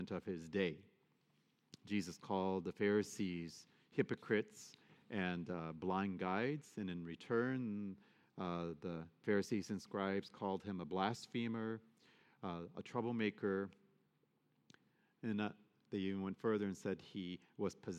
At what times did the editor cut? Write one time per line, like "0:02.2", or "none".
none